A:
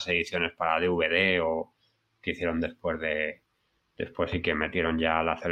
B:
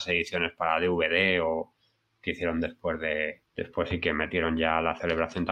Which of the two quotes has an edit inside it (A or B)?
B